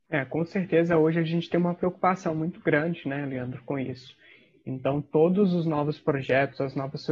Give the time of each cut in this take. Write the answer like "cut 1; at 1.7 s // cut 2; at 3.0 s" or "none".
none